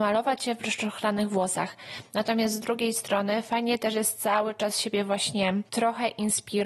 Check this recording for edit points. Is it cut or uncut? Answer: cut